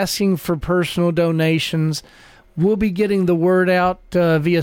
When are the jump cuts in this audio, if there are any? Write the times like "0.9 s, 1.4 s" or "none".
none